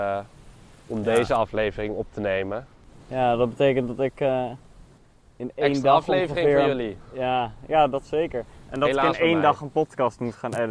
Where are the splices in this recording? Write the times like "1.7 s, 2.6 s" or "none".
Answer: none